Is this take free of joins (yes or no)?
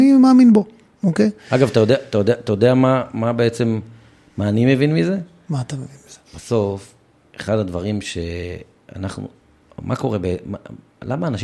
no